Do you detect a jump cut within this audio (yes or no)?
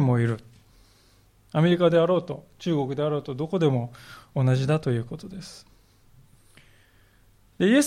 no